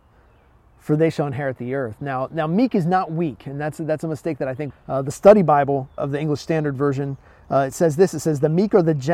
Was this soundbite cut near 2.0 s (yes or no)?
no